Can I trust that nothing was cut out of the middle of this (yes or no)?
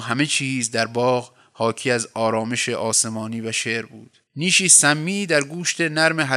no